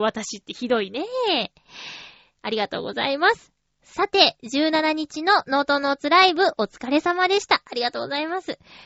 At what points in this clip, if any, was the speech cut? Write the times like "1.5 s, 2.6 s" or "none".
none